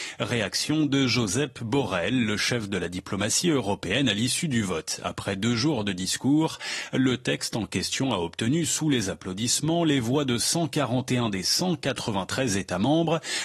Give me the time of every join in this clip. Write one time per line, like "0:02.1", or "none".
none